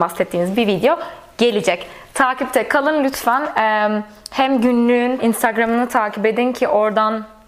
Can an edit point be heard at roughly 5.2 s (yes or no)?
yes